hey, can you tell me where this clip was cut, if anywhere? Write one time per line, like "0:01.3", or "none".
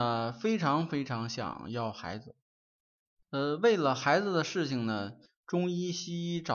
0:03.2
0:05.3

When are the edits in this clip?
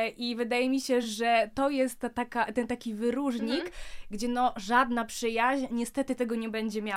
none

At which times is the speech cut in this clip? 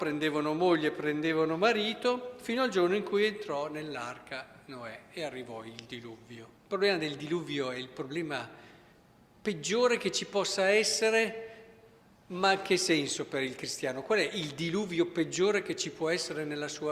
0:06.6

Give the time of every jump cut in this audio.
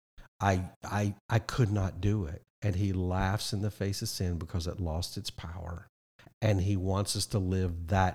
0:02.5

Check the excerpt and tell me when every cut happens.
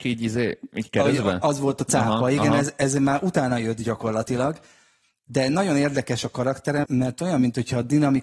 0:06.8

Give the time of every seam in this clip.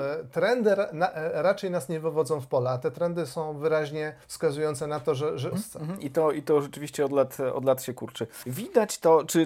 0:04.2
0:05.5

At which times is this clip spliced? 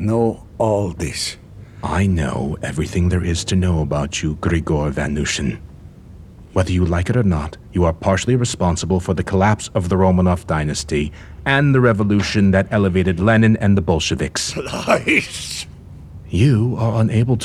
none

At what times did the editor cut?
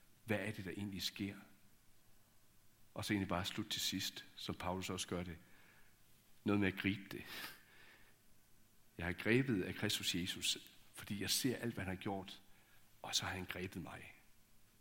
none

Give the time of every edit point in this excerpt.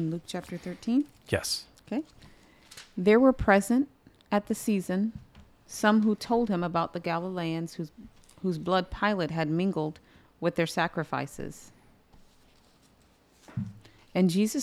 none

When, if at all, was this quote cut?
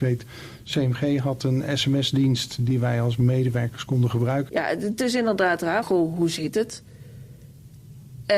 0:04.5
0:05.8

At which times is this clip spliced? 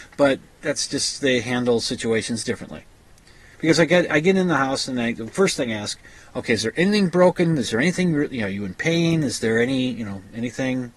0:03.5

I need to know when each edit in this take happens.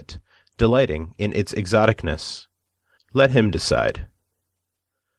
0:03.0

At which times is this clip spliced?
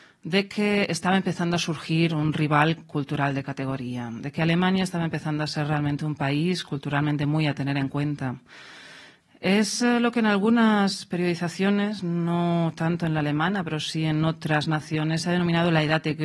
none

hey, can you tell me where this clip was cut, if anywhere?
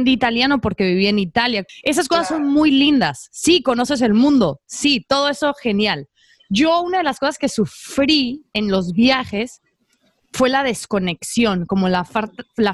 0:01.7

